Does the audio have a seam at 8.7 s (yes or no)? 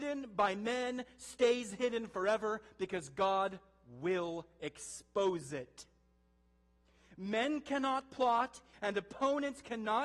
yes